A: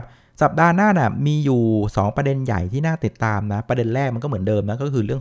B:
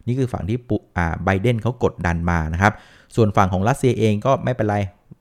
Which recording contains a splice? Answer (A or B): B